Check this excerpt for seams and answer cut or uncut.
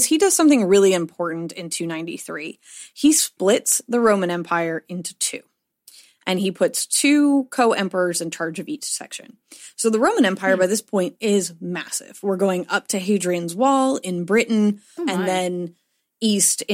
cut